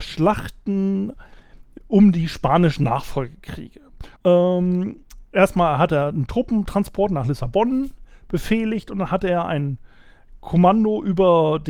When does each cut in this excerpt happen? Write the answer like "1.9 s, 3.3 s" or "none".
4.2 s